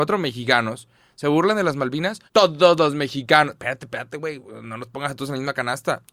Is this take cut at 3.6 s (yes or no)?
no